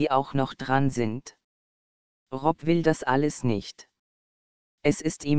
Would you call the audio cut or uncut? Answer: uncut